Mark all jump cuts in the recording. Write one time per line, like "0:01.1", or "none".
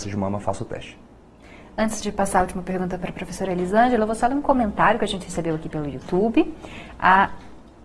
none